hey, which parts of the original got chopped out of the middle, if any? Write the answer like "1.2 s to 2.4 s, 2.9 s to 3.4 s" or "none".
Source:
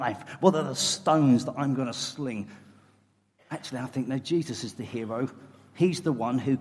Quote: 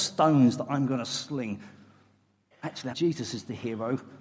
3.8 s to 4.2 s